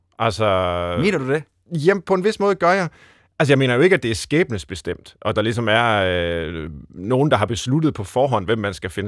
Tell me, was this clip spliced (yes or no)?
no